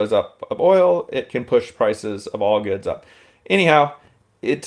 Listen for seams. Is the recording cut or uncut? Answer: uncut